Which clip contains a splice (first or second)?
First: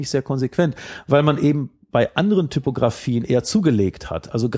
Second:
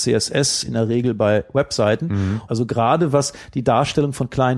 second